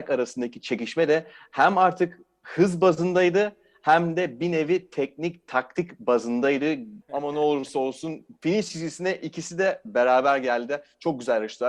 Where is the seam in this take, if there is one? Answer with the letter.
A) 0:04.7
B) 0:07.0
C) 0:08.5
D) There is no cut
B